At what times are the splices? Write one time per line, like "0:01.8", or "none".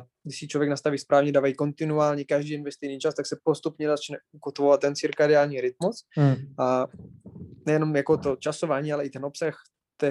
none